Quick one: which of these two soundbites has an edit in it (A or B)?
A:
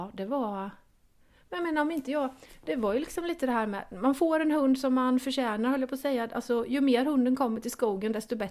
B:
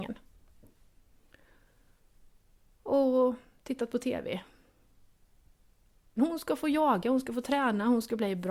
B